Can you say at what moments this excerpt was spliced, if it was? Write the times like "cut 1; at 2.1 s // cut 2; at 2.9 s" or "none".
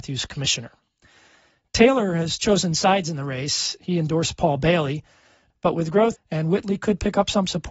cut 1; at 6.1 s